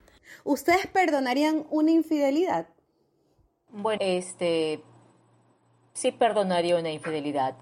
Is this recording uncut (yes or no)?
no